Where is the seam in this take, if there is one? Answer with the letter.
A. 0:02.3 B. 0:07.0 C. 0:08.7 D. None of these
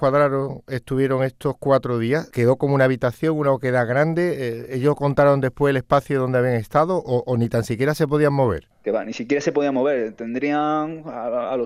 A